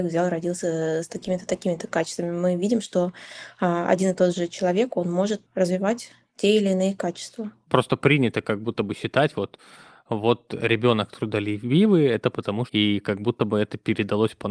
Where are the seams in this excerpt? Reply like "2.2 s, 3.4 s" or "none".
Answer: 12.7 s